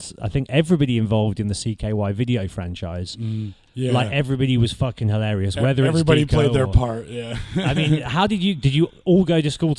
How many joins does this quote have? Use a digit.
1